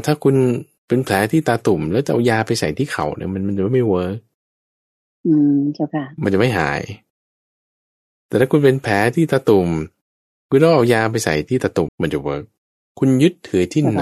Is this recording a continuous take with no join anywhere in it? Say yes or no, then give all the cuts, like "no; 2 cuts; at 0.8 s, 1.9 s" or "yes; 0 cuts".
no; 1 cut; at 11.9 s